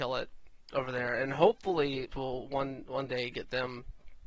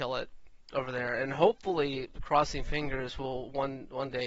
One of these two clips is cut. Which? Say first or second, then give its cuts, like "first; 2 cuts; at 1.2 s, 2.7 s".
first; 1 cut; at 2.1 s